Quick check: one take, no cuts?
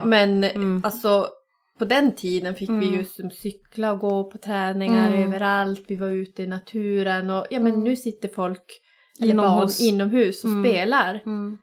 yes; 0 cuts

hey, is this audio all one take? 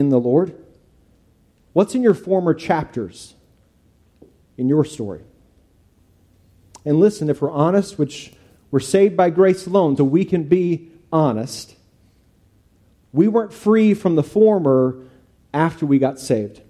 no; 1 cut; at 10.0 s

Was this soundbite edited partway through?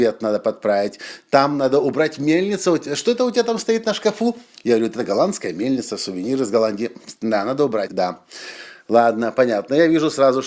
yes; 1 cut; at 7.9 s

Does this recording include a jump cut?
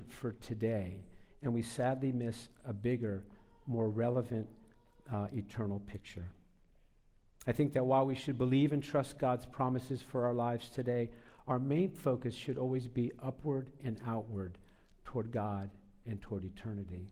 no; 0 cuts

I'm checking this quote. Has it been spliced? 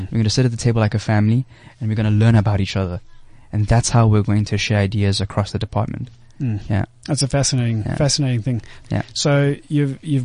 yes; 1 cut; at 8.8 s

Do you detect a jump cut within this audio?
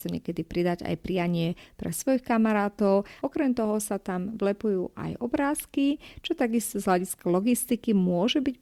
yes; 1 cut; at 3.2 s

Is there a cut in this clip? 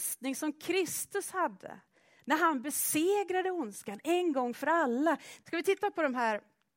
yes; 1 cut; at 5.4 s

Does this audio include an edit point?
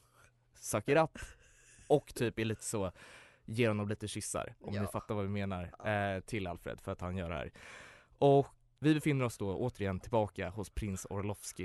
yes; 1 cut; at 8.8 s

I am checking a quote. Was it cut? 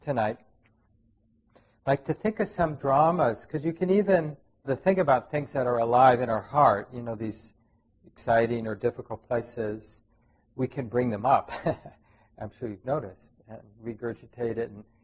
yes; 1 cut; at 4.6 s

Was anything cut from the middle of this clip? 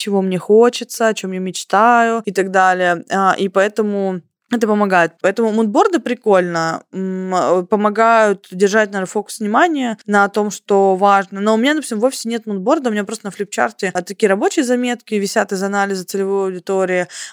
yes; 1 cut; at 5.2 s

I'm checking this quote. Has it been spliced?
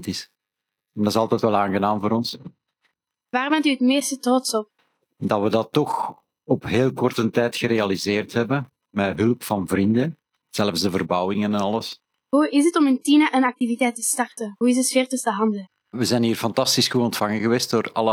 no; 0 cuts

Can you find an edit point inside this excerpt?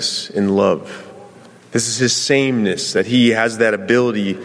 yes; 1 cut; at 1.6 s

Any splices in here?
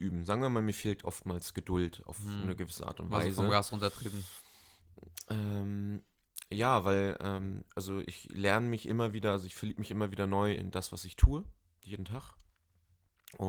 yes; 1 cut; at 10.6 s

